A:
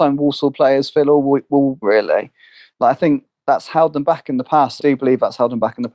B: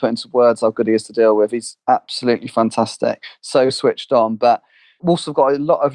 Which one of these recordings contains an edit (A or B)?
A